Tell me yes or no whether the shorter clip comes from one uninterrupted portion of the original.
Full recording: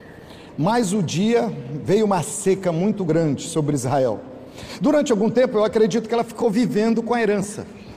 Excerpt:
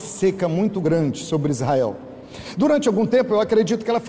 yes